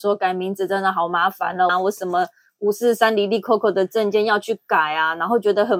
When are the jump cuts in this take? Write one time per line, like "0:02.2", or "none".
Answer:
0:01.7

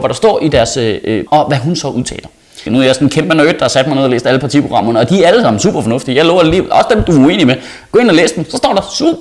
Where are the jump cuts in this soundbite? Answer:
0:01.3
0:02.7

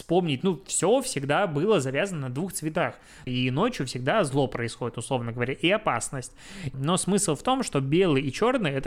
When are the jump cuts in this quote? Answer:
0:03.3
0:06.7

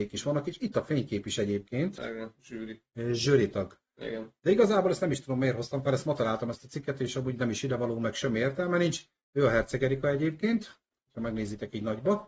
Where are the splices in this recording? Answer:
0:02.0

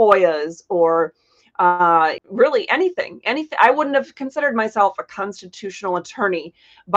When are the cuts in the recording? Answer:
0:02.2

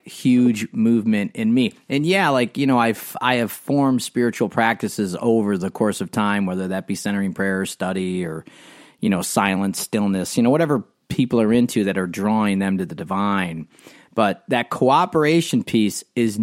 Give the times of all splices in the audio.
none

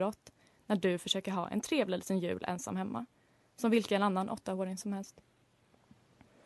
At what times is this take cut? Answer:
none

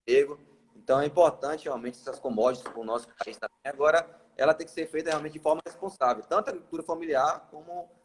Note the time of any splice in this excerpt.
none

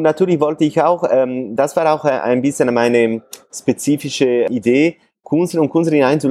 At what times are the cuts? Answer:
none

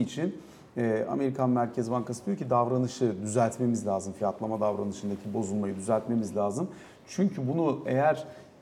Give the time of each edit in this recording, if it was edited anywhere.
none

